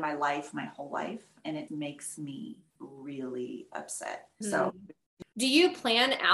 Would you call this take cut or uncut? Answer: cut